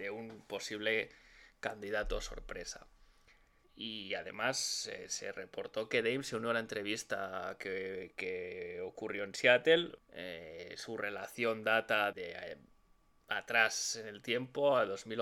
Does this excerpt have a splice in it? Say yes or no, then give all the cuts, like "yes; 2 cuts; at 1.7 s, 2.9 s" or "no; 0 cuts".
yes; 3 cuts; at 3.6 s, 10.0 s, 12.1 s